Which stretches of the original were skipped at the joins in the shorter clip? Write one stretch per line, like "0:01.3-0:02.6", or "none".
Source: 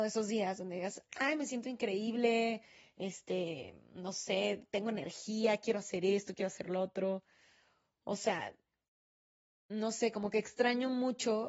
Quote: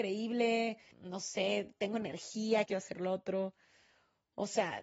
0:02.8-0:03.8
0:05.6-0:06.3